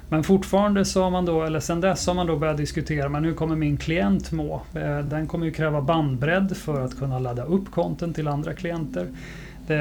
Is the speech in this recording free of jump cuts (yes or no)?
yes